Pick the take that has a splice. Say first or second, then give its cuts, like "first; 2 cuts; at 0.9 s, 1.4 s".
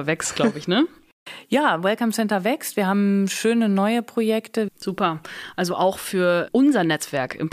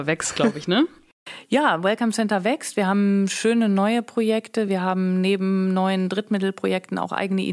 first; 2 cuts; at 4.7 s, 6.5 s